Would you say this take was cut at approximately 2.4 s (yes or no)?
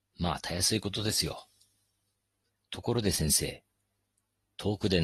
no